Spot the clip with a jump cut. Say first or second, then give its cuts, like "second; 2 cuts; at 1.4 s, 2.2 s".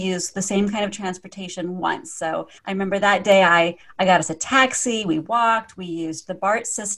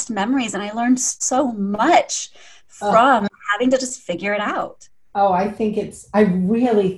first; 1 cut; at 2.6 s